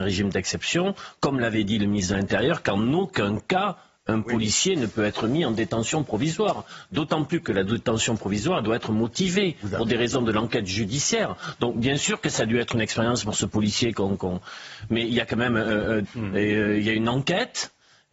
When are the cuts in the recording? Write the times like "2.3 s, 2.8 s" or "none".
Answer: 16.0 s